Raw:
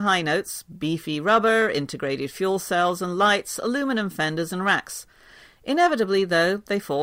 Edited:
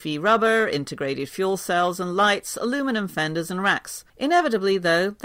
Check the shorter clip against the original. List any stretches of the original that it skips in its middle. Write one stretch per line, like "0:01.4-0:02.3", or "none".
0:05.1-0:05.6